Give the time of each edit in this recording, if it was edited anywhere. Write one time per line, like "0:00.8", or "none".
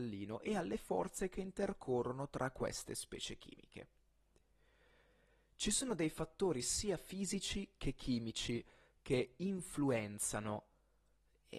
none